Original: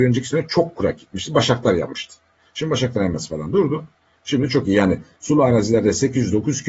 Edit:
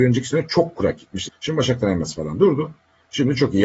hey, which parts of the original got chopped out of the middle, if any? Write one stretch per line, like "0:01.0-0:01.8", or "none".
0:01.3-0:02.4